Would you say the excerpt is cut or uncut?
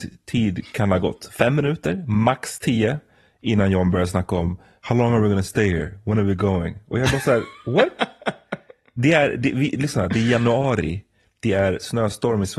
uncut